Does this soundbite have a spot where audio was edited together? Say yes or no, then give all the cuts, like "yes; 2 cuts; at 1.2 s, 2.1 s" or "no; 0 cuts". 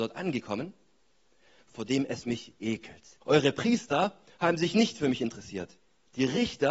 yes; 2 cuts; at 1.6 s, 3.2 s